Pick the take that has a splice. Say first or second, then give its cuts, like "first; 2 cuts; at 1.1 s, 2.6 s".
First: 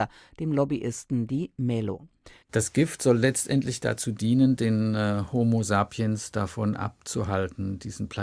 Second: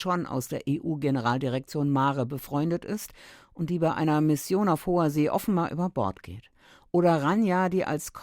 first; 1 cut; at 2.4 s